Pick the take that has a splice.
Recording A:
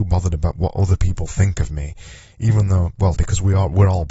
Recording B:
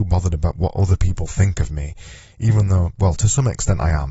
A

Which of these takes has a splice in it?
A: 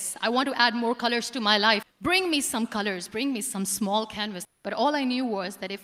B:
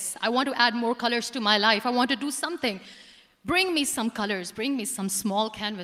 A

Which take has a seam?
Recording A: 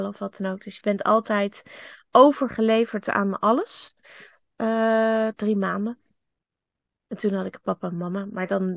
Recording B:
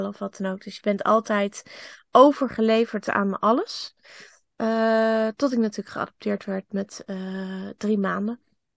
A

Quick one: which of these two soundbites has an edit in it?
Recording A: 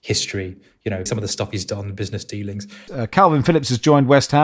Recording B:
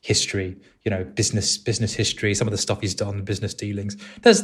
A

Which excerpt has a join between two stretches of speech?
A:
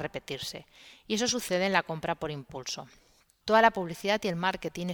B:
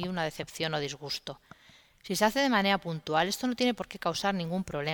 A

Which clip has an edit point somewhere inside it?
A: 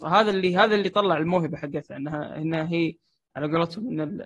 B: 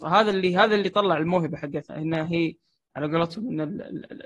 B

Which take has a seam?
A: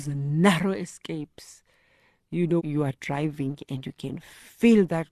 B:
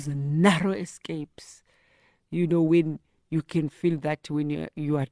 A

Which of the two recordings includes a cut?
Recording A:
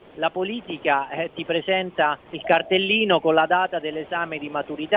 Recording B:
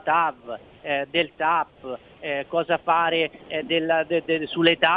A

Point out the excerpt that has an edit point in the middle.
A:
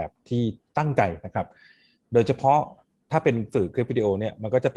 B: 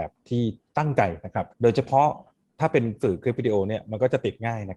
B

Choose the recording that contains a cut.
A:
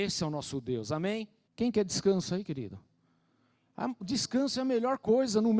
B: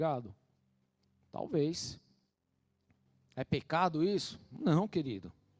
A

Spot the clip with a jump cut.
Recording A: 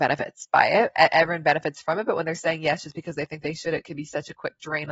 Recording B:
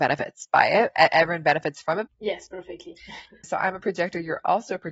B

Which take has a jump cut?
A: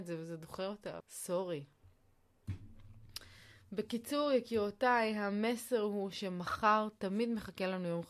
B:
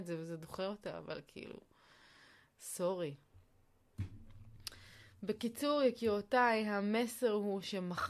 A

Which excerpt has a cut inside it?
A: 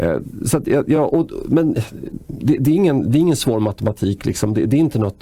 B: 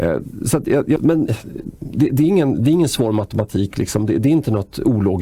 B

